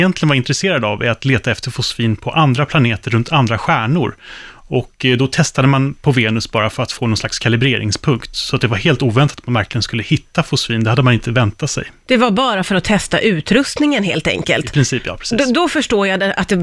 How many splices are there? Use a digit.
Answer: 0